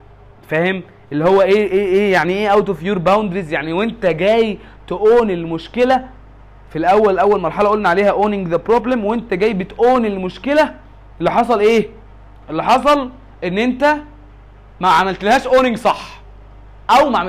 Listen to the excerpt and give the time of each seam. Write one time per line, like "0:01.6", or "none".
none